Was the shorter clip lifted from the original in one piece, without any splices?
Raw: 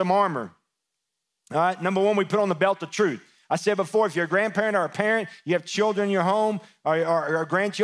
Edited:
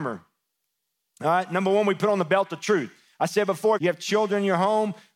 no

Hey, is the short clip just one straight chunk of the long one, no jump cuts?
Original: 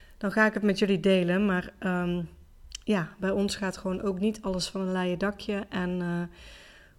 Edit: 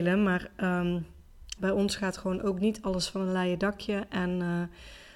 no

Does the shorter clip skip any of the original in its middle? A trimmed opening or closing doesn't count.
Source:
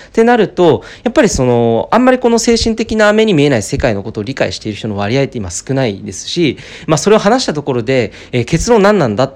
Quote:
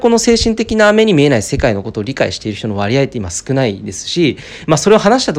no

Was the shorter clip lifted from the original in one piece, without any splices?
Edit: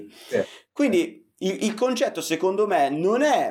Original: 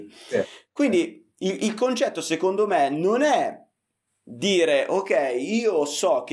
yes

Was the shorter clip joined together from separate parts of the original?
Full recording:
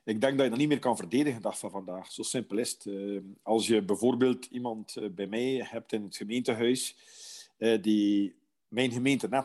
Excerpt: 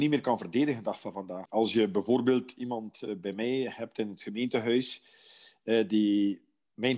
yes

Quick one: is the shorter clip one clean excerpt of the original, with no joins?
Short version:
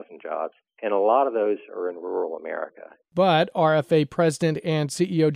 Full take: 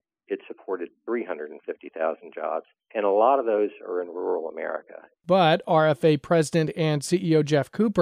yes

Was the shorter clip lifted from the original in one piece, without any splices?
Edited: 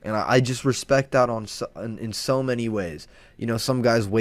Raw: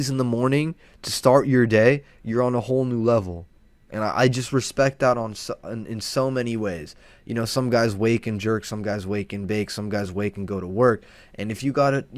yes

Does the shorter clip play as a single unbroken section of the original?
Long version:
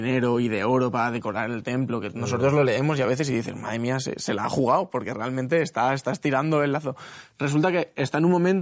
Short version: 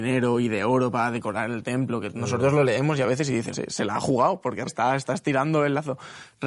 no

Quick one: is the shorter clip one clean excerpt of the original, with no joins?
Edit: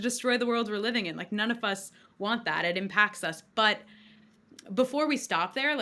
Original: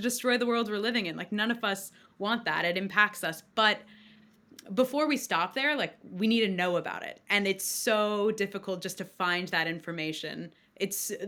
yes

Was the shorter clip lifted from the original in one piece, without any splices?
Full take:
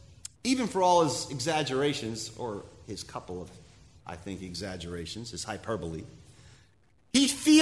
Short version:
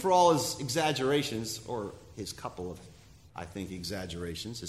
yes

